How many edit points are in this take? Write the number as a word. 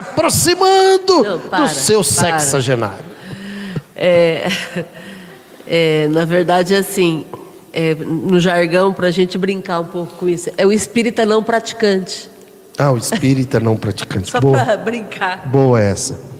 zero